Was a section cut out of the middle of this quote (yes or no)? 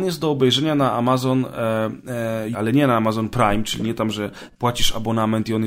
yes